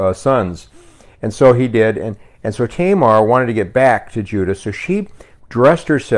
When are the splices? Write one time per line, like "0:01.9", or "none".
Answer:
none